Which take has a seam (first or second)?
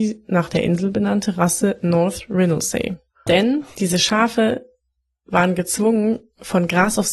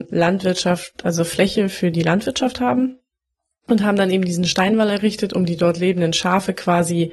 first